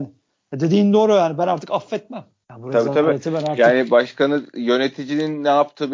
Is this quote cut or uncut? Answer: uncut